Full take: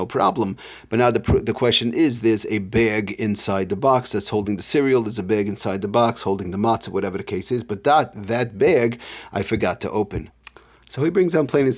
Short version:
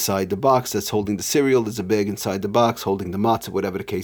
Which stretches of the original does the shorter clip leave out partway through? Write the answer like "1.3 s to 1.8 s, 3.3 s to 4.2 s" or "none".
none